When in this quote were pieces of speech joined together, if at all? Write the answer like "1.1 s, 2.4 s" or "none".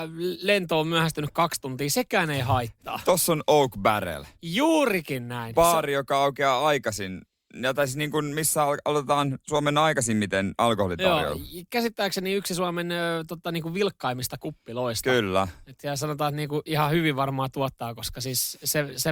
none